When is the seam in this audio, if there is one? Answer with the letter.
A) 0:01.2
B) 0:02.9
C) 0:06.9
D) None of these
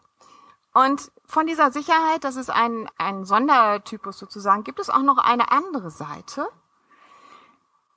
B